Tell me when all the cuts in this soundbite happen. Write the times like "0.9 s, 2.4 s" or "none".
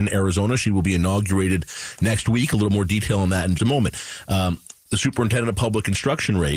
3.6 s